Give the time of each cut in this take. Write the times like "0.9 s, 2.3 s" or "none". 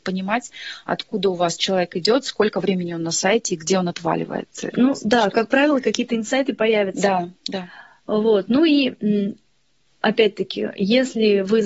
4.7 s